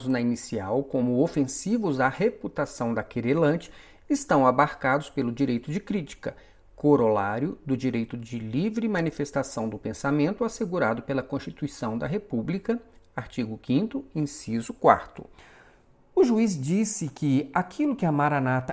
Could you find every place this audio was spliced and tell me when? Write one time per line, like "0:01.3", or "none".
none